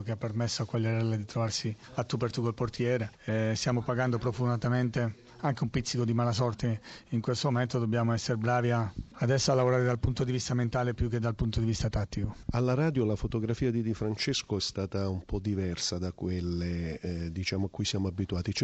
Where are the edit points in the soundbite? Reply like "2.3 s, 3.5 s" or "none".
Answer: 3.1 s